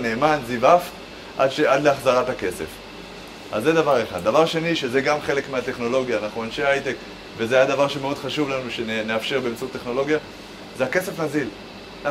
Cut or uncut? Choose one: uncut